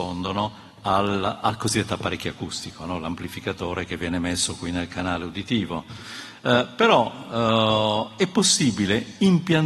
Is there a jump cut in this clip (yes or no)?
no